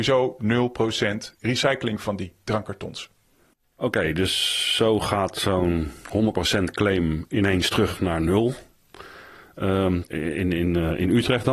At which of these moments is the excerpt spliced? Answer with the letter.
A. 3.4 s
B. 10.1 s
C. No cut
B